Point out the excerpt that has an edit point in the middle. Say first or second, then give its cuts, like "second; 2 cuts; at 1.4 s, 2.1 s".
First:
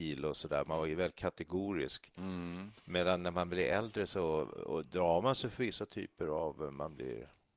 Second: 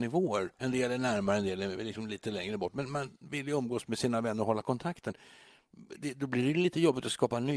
first; 1 cut; at 2.8 s